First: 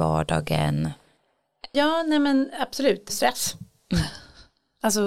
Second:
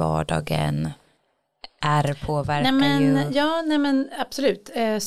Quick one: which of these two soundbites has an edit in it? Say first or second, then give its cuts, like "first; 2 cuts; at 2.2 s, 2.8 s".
first; 2 cuts; at 1.7 s, 3.1 s